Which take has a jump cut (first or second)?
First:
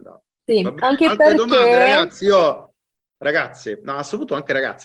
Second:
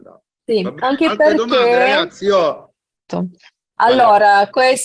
second